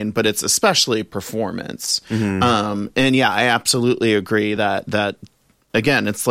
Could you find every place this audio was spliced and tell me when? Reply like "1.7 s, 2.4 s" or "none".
none